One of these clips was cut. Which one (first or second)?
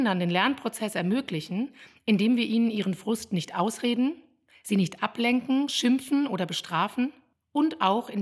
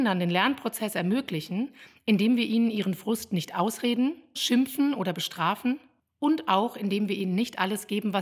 second